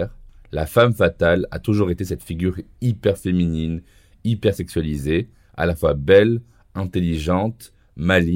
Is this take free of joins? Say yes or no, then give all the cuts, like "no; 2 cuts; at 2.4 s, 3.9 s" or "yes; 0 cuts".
yes; 0 cuts